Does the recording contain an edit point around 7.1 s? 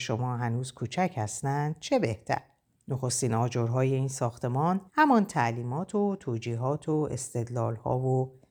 no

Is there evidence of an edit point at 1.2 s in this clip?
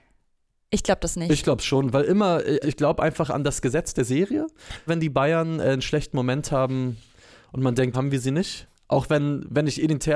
no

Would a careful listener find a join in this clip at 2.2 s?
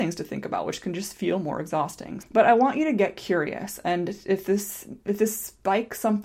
yes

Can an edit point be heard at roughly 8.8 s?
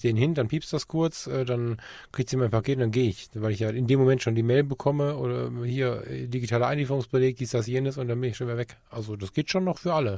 no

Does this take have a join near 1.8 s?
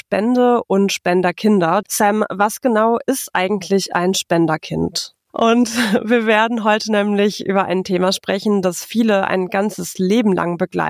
yes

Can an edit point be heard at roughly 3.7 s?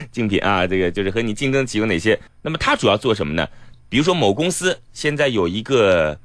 yes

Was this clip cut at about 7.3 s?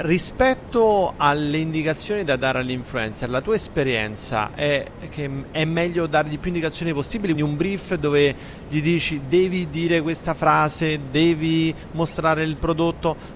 yes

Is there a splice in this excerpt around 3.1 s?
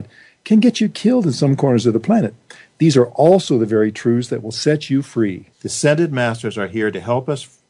no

